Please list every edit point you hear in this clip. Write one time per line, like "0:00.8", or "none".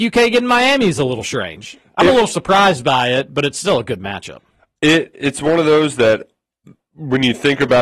none